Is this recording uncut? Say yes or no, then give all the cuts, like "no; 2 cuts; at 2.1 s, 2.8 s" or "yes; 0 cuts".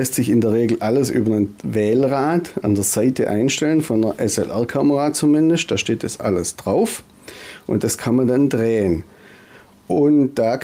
yes; 0 cuts